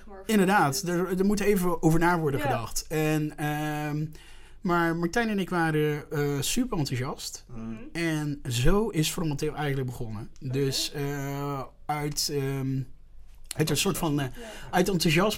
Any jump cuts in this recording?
no; 0 cuts

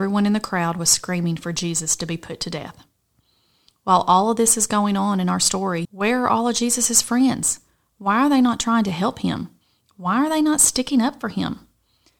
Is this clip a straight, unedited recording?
no; 1 cut; at 5.8 s

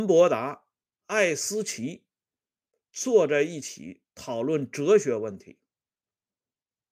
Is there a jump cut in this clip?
no; 0 cuts

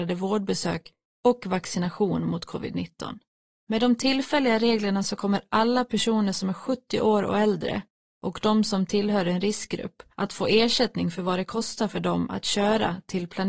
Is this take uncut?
no; 2 cuts; at 3.6 s, 10.1 s

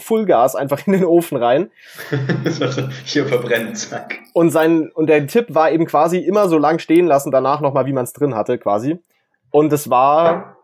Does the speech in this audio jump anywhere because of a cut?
no; 0 cuts

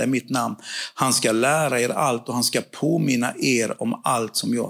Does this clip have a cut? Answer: no; 0 cuts

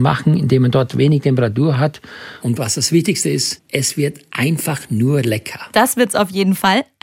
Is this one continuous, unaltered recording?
no; 1 cut; at 2.4 s

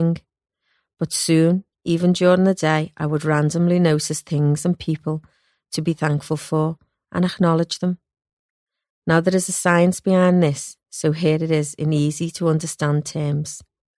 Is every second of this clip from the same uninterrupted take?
yes; 0 cuts

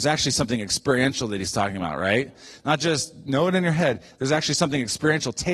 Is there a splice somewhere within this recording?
no; 0 cuts

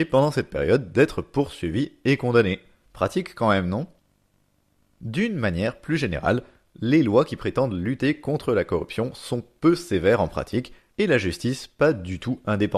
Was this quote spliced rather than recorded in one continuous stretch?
no; 0 cuts

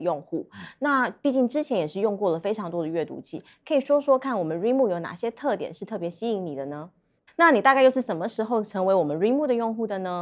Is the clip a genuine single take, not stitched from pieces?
no; 1 cut; at 7.3 s

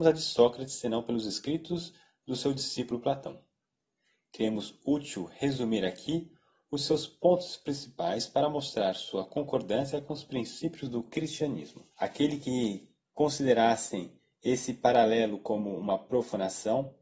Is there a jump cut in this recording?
yes; 1 cut; at 11.9 s

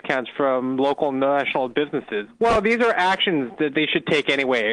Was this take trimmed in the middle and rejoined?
yes; 1 cut; at 2.3 s

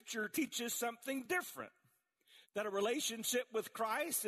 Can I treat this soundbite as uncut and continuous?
no; 1 cut; at 2.4 s

